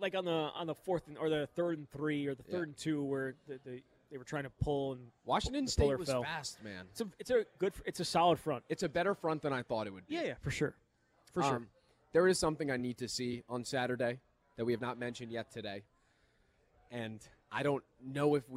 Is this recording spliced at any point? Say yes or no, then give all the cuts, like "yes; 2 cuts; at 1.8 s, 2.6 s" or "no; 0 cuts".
no; 0 cuts